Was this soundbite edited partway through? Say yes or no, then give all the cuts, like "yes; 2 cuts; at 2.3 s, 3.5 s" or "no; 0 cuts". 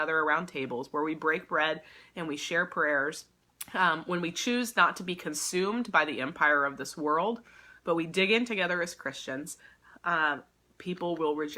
no; 0 cuts